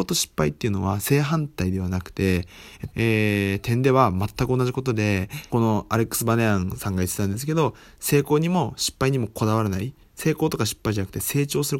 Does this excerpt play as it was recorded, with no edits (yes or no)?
no